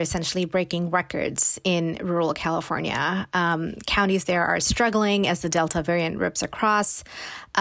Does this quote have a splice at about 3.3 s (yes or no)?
no